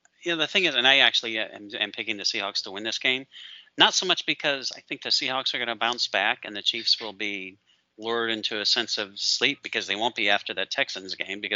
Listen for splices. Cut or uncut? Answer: uncut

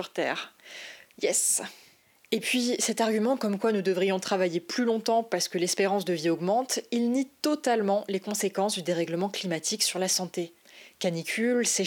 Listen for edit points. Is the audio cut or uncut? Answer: uncut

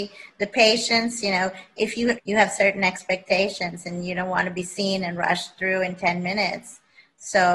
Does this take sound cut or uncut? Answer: cut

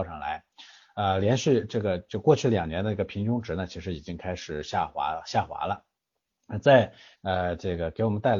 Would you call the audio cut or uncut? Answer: cut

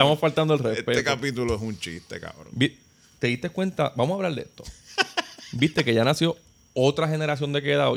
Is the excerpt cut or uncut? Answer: uncut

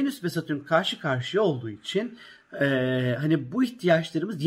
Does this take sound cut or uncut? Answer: uncut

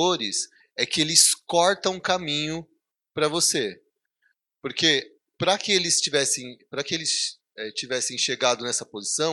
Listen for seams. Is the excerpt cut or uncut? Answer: uncut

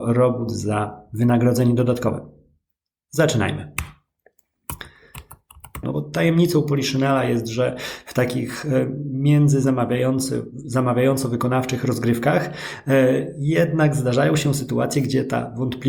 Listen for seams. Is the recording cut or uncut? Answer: cut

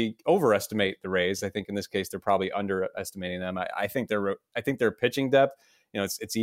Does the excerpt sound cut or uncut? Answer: uncut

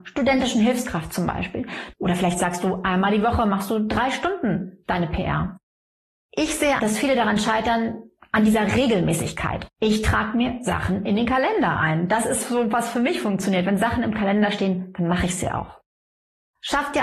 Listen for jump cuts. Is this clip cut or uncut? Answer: cut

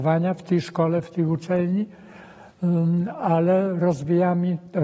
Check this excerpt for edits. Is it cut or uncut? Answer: uncut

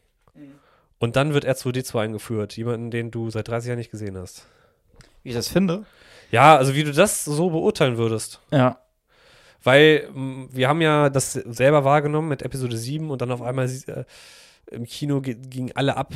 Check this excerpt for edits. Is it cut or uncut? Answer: uncut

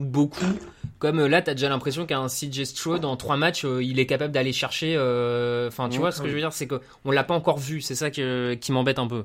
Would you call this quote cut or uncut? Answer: uncut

